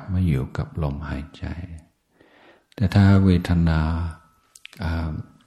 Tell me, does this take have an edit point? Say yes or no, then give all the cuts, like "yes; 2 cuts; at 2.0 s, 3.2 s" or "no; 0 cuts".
no; 0 cuts